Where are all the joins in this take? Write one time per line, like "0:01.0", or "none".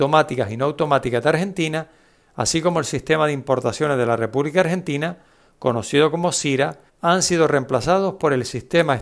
0:06.9